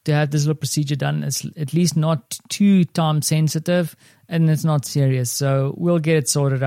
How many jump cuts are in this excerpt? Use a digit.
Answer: 0